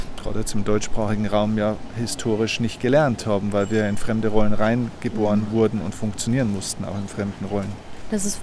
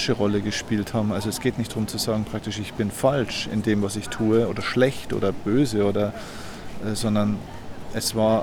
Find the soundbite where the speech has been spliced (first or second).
second